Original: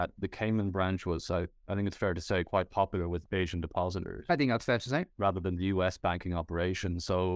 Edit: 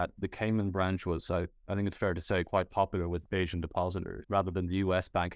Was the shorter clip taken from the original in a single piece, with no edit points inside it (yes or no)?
no